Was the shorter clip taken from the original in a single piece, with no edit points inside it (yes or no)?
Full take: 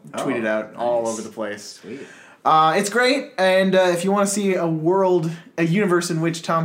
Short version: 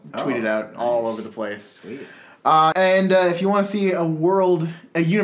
no